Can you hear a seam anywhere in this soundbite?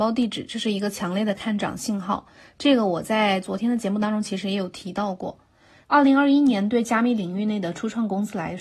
yes; 1 cut; at 5.8 s

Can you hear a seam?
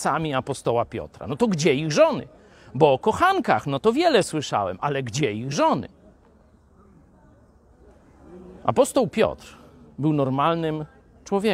no; 0 cuts

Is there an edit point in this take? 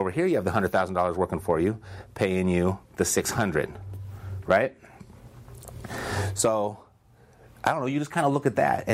no; 0 cuts

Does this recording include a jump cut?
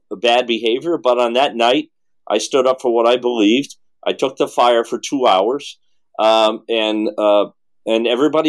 no; 0 cuts

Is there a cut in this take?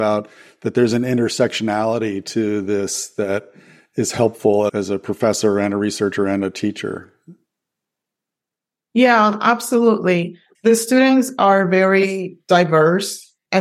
no; 0 cuts

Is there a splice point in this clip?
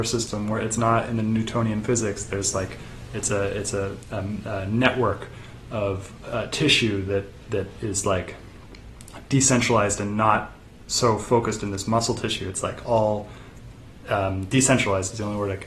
no; 0 cuts

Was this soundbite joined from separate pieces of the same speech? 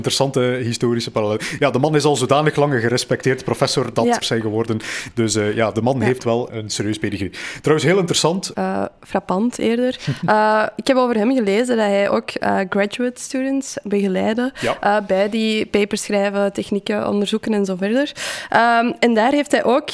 yes; 3 cuts; at 4.2 s, 6.5 s, 8.5 s

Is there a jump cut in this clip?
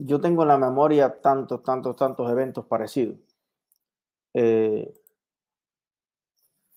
no; 0 cuts

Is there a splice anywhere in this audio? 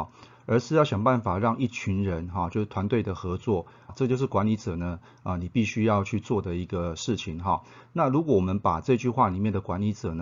yes; 1 cut; at 3.9 s

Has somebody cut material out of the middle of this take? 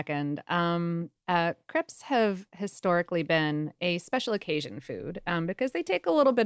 no; 0 cuts

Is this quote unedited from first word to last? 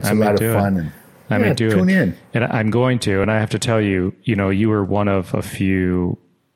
yes; 0 cuts

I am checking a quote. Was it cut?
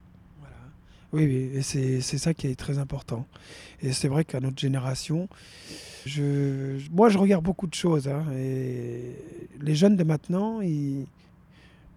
yes; 1 cut; at 6.1 s

